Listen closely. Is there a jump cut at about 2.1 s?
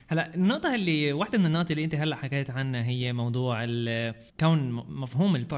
no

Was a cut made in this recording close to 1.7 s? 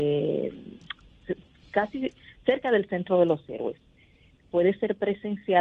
no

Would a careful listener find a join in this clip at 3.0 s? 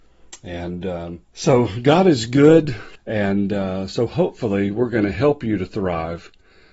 yes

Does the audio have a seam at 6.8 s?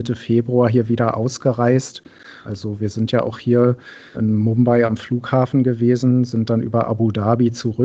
no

